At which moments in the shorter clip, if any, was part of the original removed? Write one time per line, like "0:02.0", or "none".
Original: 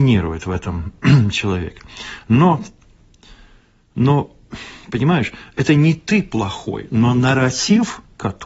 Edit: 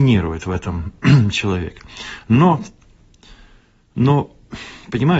none